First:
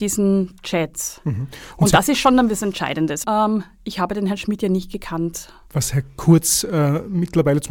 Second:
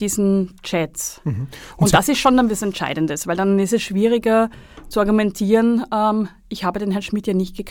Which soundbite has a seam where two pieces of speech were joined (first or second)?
first